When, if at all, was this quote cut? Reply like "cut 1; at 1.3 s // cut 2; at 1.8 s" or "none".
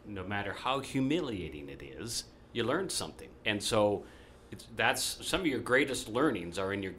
cut 1; at 3.4 s // cut 2; at 5.2 s